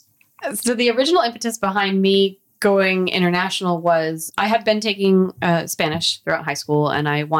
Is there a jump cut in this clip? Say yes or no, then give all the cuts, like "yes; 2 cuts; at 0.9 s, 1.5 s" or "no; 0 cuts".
yes; 1 cut; at 4.3 s